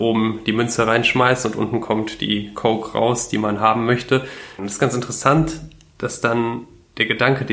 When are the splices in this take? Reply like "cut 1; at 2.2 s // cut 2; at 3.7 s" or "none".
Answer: cut 1; at 4.6 s